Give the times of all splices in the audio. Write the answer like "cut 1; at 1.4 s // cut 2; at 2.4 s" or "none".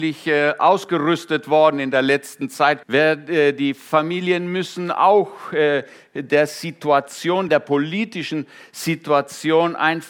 cut 1; at 2.8 s // cut 2; at 7.5 s